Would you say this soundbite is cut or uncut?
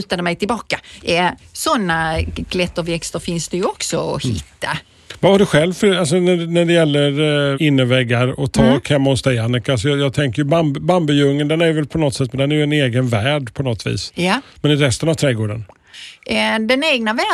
cut